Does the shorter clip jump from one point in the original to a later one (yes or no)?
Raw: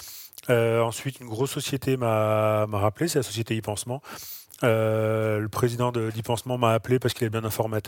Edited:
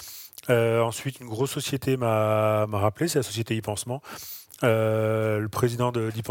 no